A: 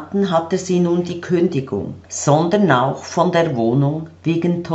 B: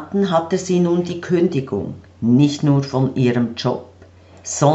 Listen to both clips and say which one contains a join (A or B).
A